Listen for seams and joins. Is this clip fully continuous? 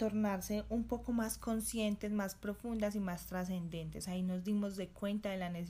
yes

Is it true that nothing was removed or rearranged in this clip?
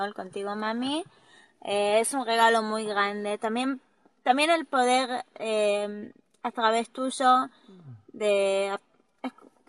yes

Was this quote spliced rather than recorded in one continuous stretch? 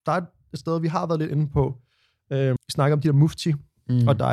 yes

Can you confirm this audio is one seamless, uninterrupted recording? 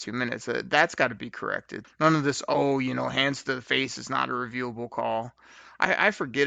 no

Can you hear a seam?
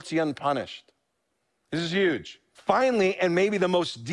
yes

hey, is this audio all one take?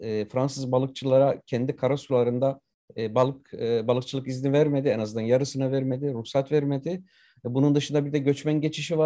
yes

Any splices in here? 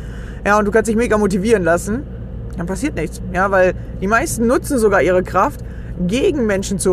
yes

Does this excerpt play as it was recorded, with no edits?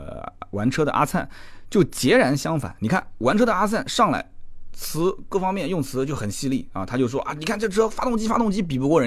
yes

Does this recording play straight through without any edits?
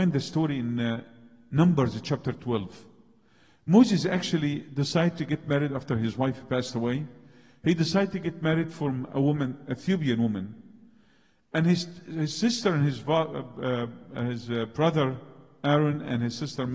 yes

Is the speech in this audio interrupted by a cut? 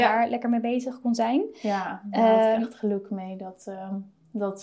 no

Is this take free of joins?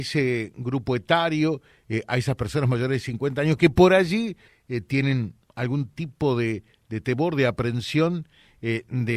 no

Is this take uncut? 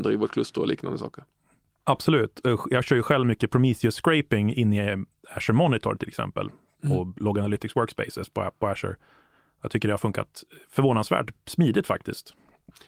yes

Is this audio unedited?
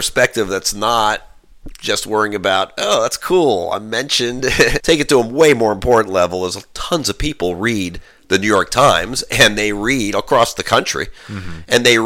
no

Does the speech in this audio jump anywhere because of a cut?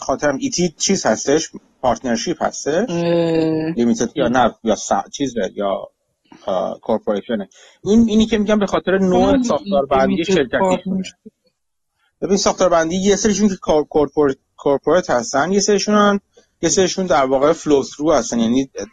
yes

